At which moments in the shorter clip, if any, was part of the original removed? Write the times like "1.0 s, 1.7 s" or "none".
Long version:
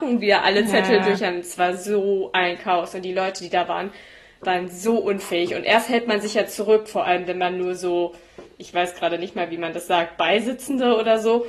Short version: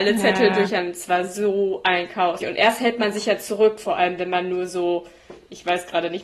2.4 s